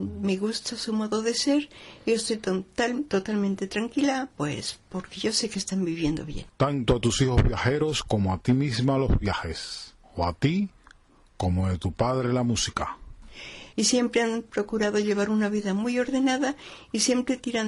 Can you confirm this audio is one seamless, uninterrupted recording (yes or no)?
no